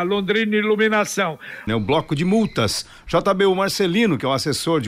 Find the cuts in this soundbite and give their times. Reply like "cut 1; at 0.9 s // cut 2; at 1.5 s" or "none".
cut 1; at 1.7 s